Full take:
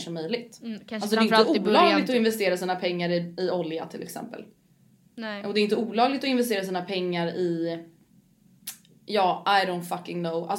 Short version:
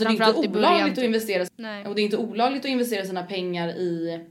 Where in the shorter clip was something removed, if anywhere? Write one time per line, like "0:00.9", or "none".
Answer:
0:01.5